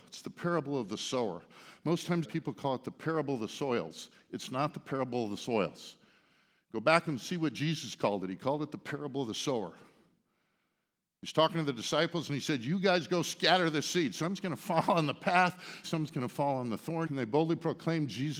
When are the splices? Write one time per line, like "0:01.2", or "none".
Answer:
0:02.2
0:15.8
0:17.1